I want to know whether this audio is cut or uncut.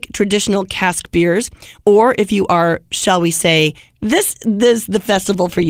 cut